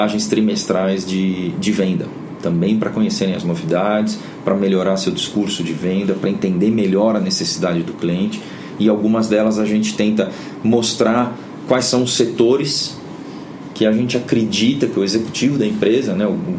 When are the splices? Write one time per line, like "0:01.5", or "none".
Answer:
none

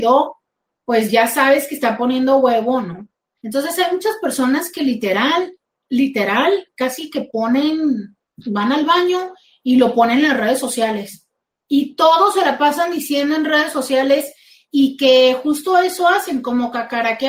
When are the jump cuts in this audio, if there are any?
none

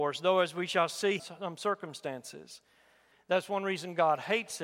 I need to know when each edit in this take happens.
0:01.2
0:03.1

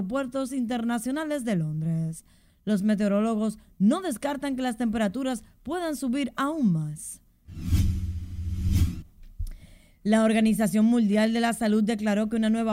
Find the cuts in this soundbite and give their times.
none

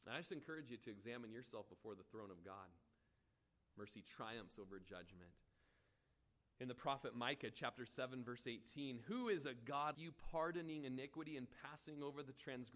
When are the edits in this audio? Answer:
0:03.7
0:09.9

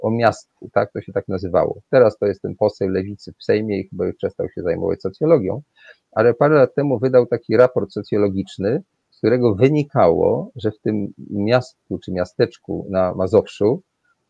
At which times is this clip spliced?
none

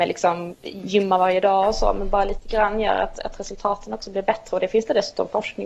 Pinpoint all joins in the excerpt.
none

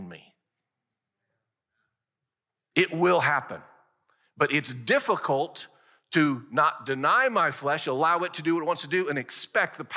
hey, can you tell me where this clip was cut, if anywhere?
none

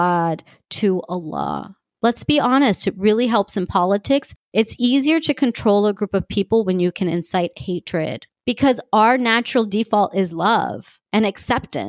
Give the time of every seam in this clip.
0:01.9

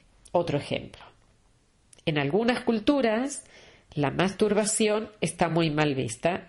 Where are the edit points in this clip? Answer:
none

